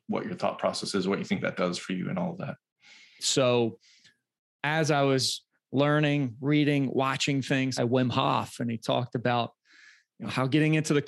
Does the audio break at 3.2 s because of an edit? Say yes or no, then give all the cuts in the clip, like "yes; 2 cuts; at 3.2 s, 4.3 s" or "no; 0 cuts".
yes; 2 cuts; at 3.2 s, 7.8 s